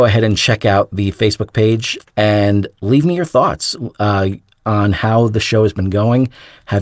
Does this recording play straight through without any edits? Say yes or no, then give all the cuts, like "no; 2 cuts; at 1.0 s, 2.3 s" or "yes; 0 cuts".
no; 1 cut; at 2.0 s